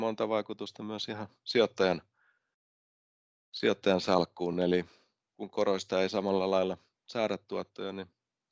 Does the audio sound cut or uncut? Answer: uncut